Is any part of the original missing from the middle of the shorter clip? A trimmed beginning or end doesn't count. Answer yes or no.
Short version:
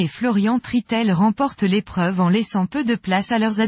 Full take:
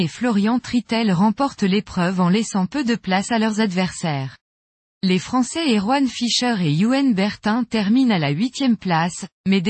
no